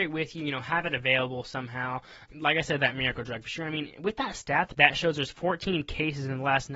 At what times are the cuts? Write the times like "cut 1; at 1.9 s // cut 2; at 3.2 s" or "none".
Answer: cut 1; at 2.3 s // cut 2; at 4.7 s